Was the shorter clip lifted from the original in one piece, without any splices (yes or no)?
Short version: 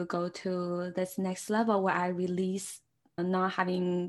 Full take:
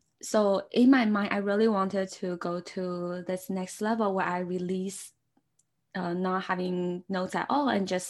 no